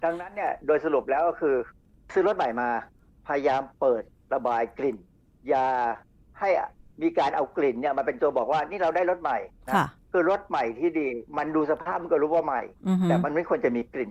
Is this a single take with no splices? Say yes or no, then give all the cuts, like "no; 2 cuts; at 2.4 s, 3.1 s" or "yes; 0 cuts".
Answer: no; 1 cut; at 11.3 s